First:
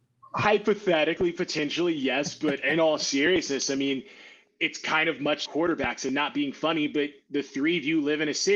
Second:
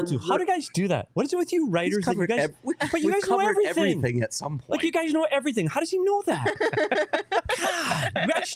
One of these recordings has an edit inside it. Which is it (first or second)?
first